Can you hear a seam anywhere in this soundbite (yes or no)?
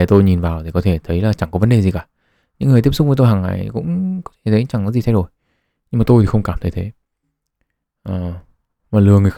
no